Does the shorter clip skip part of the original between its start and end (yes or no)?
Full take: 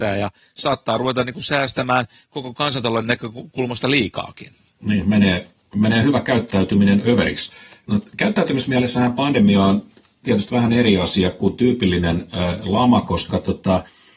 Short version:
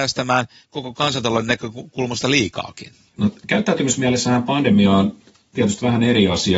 yes